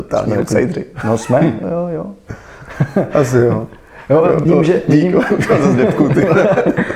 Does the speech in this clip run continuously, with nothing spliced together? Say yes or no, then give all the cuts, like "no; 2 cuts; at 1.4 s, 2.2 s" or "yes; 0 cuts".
no; 2 cuts; at 1.6 s, 4.5 s